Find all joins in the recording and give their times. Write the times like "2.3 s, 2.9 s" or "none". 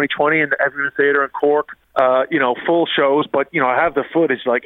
1.8 s